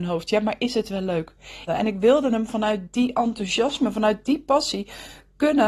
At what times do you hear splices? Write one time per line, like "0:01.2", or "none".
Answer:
0:01.7